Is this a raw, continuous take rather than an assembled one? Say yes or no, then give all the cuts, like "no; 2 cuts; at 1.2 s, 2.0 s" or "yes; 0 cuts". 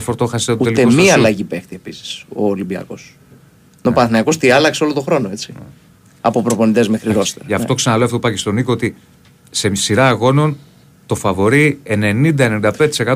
yes; 0 cuts